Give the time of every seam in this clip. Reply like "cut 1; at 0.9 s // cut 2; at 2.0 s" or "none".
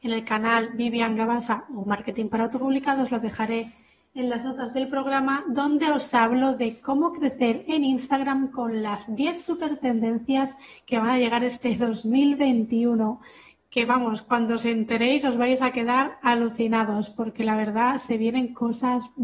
none